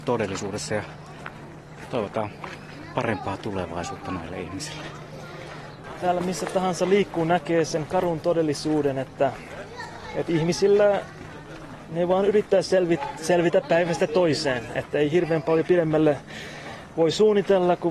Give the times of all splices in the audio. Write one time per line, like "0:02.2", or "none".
none

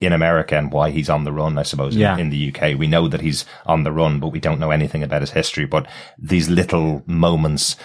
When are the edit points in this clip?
none

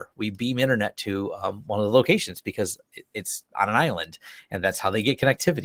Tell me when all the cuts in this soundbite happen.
none

